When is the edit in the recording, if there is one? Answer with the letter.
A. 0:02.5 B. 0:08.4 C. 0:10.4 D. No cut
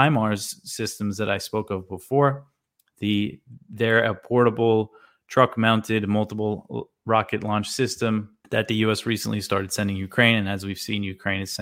B